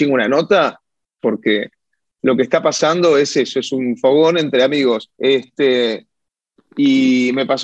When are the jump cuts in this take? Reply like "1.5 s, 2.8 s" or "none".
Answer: 1.2 s, 5.2 s